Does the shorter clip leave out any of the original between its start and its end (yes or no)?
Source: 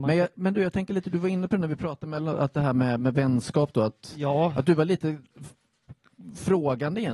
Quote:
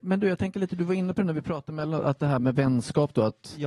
yes